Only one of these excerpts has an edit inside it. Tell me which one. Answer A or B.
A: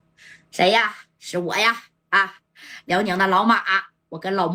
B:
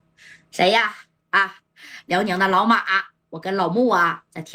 B